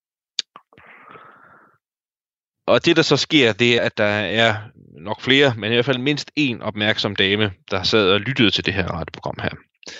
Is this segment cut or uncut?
cut